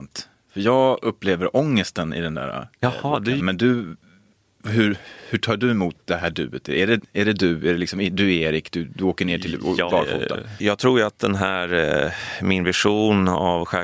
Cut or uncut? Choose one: cut